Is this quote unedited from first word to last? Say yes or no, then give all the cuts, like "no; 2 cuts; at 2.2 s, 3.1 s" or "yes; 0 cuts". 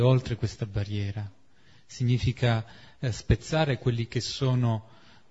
yes; 0 cuts